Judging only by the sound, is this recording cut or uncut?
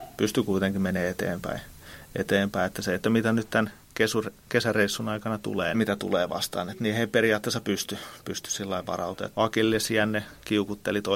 cut